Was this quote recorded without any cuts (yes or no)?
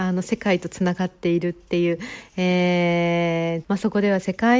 no